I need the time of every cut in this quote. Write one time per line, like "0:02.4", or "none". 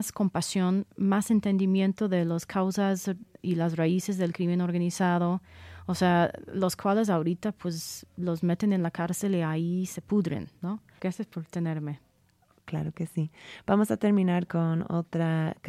0:11.0